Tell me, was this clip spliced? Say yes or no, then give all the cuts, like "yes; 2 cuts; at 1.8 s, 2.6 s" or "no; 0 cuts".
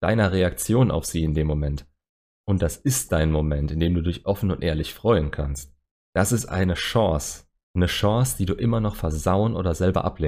no; 0 cuts